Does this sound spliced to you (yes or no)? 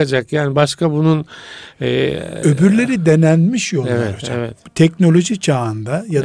no